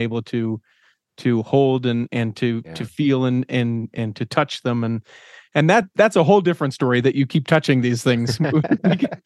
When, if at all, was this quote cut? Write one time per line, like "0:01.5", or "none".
none